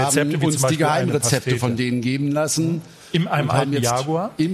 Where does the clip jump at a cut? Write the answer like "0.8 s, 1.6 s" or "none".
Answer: none